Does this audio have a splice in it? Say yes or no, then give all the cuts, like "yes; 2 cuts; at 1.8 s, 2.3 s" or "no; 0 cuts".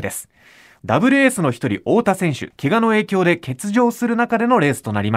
yes; 1 cut; at 2.5 s